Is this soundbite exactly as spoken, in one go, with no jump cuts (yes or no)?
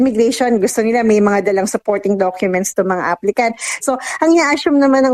no